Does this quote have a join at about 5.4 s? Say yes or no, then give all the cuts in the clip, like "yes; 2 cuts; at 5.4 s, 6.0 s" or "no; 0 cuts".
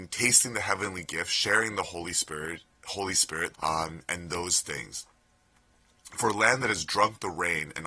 no; 1 cut; at 3.5 s